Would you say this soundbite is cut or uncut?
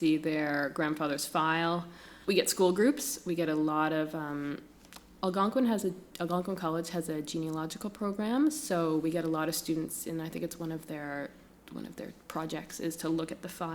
cut